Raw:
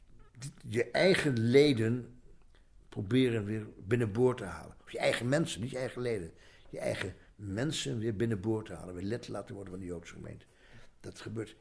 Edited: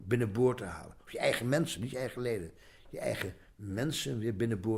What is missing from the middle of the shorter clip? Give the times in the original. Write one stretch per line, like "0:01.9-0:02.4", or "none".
none

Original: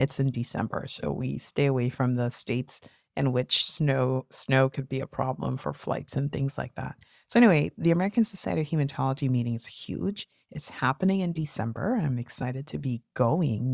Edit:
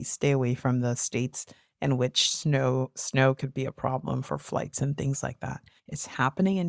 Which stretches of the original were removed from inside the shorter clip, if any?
0:07.1-0:10.4

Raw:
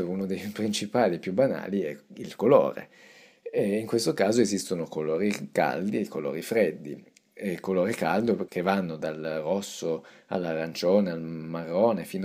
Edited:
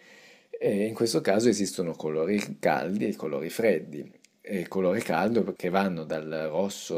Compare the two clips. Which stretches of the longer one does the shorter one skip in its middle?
none

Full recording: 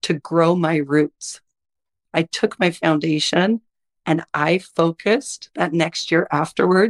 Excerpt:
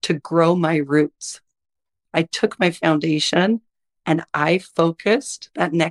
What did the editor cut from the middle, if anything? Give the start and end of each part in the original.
none

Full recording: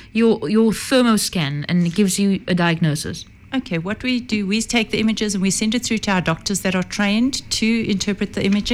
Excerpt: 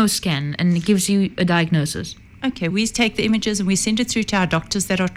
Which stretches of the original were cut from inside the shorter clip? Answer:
0:03.8-0:04.5

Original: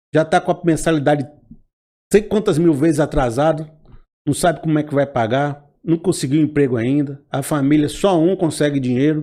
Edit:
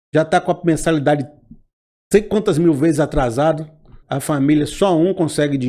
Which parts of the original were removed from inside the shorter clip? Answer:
0:04.0-0:07.2

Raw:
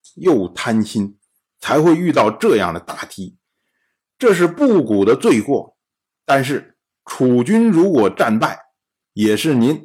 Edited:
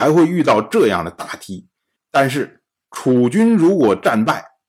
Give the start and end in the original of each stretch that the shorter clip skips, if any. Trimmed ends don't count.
0:03.6-0:06.1

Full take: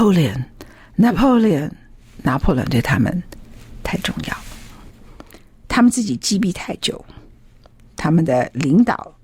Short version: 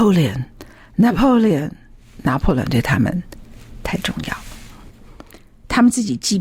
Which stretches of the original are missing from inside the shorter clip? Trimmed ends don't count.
none

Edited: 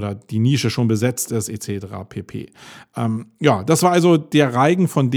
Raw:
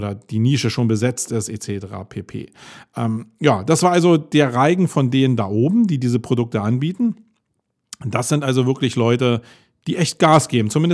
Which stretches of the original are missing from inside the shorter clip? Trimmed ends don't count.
none

